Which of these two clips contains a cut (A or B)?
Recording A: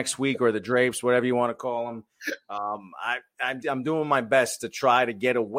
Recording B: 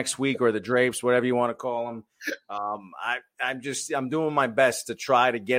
A